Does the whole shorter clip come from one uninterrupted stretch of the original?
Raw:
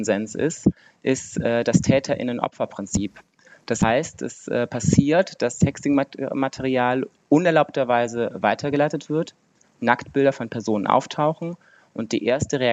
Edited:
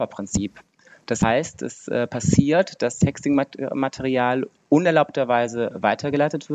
yes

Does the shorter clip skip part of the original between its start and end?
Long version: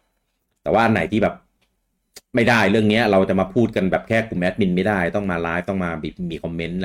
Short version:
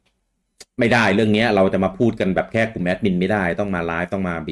no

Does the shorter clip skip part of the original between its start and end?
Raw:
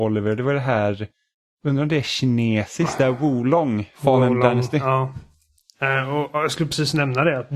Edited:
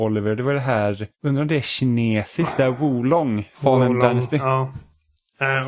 yes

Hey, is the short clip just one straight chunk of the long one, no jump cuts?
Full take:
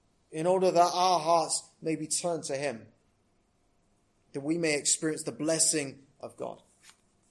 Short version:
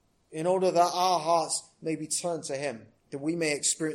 no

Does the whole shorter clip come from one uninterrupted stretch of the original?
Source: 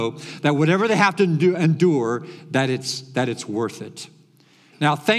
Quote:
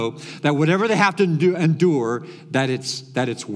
yes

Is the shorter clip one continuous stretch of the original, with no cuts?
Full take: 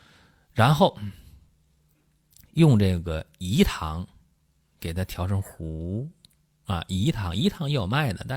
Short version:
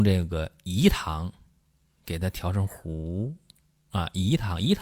yes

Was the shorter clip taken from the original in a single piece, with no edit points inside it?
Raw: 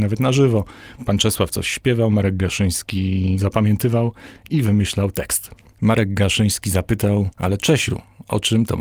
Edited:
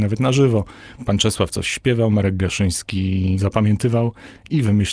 yes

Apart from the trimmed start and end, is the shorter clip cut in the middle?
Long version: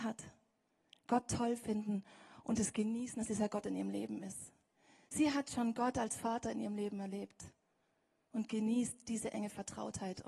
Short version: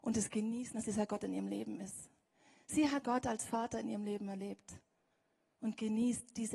yes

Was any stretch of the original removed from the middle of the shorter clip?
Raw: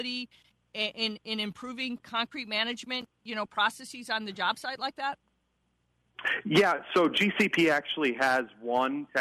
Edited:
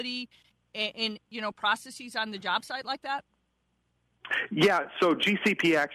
yes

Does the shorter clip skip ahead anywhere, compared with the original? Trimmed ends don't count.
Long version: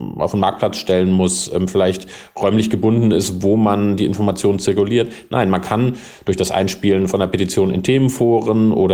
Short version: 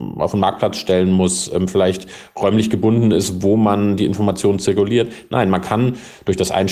no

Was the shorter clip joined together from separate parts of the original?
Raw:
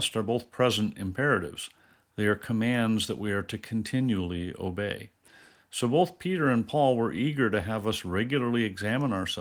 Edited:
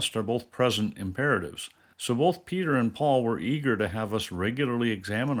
yes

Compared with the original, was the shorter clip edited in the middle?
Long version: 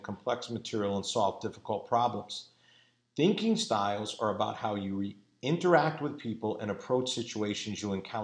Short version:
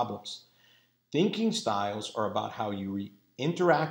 no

